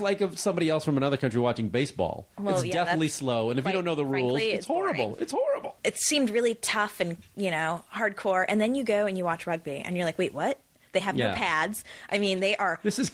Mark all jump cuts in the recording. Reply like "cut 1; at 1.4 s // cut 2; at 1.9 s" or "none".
cut 1; at 5.8 s